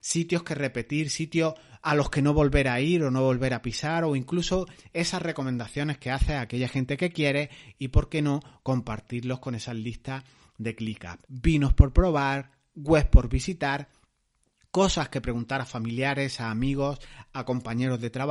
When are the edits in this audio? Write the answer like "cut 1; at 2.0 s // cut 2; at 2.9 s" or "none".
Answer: cut 1; at 11.2 s

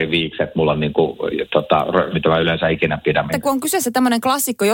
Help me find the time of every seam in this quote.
cut 1; at 2.1 s // cut 2; at 3.3 s

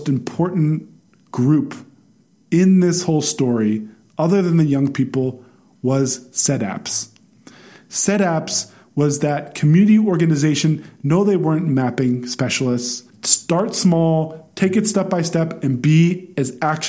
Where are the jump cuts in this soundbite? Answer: cut 1; at 13.1 s

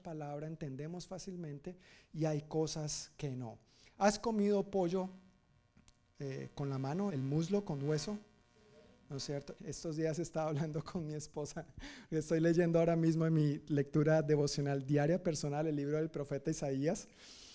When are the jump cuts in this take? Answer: cut 1; at 7.1 s // cut 2; at 9.6 s

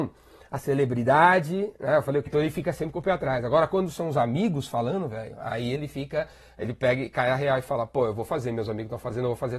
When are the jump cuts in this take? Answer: cut 1; at 2.3 s

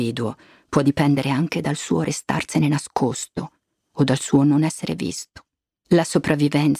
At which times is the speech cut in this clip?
cut 1; at 5.8 s

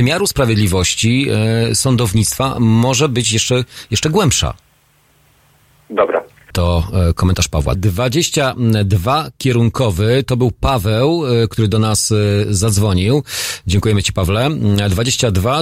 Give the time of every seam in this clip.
cut 1; at 6.5 s // cut 2; at 7.8 s

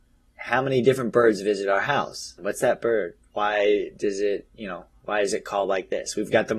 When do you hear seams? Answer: cut 1; at 2.4 s

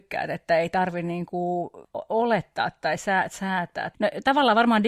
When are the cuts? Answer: none

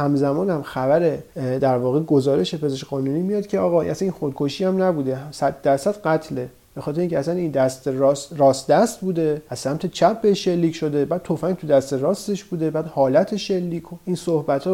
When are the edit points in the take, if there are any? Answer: none

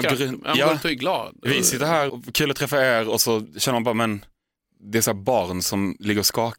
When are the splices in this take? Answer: cut 1; at 2.1 s

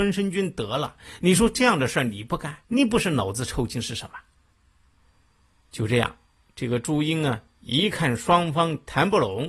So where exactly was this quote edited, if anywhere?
cut 1; at 2.6 s

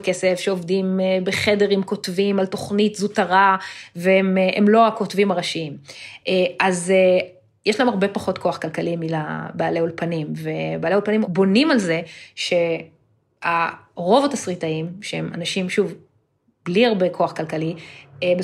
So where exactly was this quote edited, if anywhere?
none

